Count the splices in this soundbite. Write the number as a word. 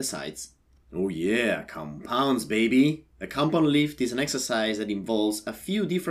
zero